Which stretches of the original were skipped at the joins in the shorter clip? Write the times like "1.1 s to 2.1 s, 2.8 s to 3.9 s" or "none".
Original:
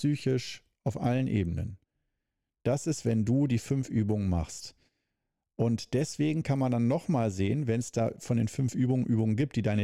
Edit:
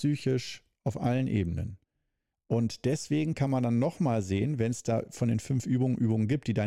2.3 s to 5.4 s